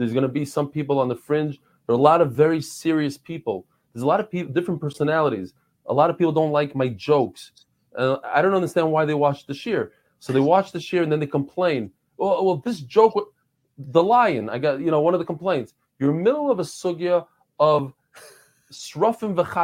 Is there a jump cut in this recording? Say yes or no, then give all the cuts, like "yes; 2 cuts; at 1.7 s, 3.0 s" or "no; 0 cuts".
no; 0 cuts